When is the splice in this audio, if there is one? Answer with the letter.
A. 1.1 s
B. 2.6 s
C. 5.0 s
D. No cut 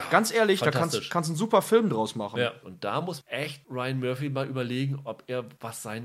B